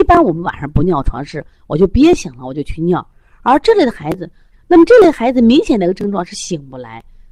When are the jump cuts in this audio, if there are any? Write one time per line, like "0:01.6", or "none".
0:04.5